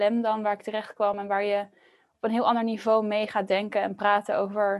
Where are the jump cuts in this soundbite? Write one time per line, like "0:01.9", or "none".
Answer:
none